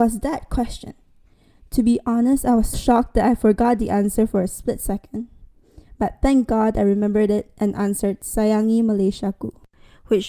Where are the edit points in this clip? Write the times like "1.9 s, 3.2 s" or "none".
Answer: 2.7 s